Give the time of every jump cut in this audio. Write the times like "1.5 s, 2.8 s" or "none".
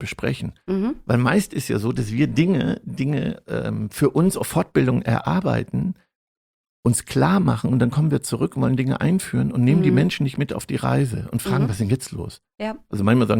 none